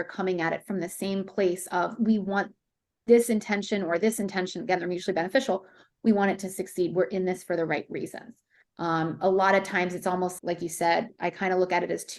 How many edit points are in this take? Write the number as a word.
two